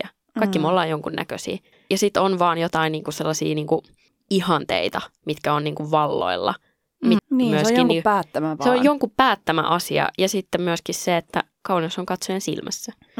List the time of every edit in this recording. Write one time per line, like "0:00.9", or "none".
0:07.2

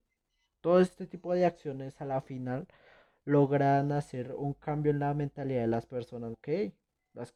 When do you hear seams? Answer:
0:06.3

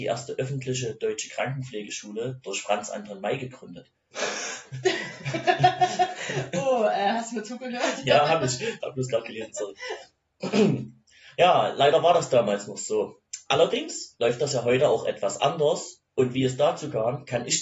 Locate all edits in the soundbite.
0:04.1

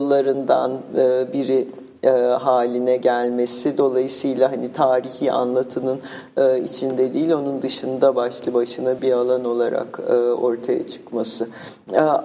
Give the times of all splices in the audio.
0:09.0

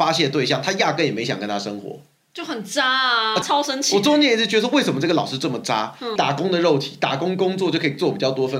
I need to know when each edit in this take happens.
0:03.4
0:06.2

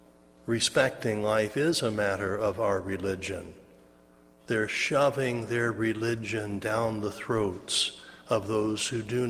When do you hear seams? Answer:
0:04.4

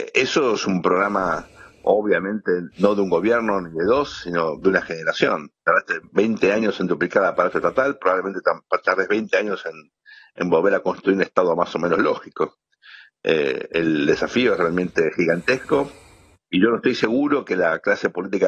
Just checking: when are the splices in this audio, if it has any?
0:05.6

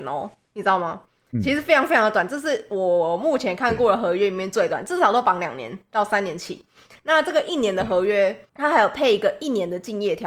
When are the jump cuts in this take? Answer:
none

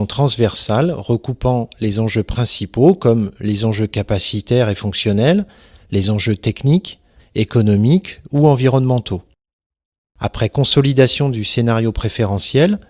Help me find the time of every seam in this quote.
0:07.2
0:10.1

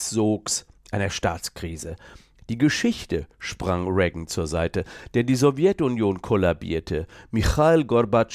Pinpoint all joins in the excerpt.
none

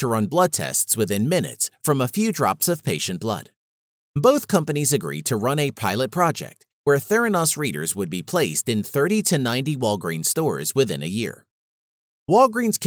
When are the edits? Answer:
0:04.0

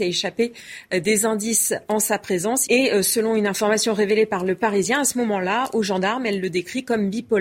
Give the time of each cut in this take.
0:02.7

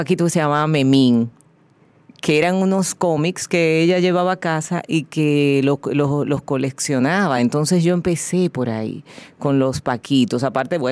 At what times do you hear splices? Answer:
none

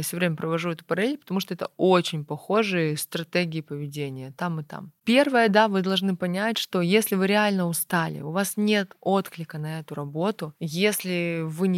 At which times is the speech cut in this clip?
none

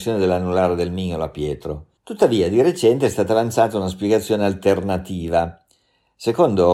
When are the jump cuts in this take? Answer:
0:02.0

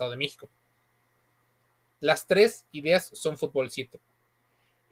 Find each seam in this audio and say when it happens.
0:01.9

